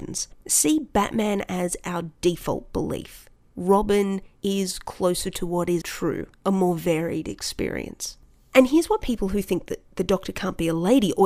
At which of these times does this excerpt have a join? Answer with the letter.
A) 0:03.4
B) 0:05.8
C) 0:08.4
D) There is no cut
B